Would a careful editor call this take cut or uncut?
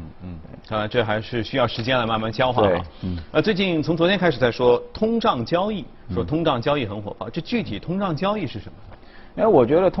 uncut